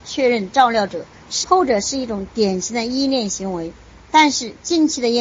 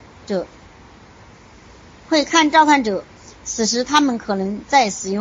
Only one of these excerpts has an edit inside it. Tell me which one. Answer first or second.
first